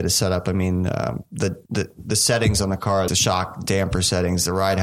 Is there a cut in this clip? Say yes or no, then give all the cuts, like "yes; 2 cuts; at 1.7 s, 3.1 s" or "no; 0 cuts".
yes; 2 cuts; at 1.7 s, 3.1 s